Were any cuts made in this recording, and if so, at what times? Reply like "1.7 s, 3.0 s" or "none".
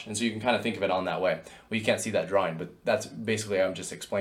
none